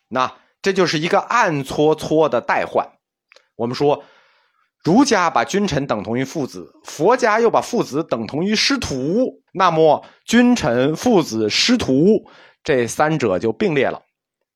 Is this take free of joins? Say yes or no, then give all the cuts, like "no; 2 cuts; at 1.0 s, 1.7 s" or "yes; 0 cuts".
no; 1 cut; at 9.5 s